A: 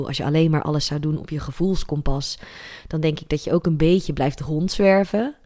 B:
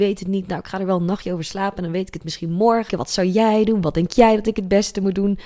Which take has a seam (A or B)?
B